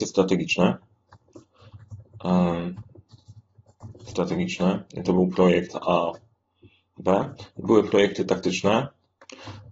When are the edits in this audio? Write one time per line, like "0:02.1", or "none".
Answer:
none